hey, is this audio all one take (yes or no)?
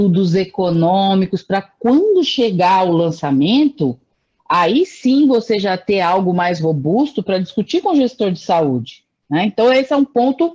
yes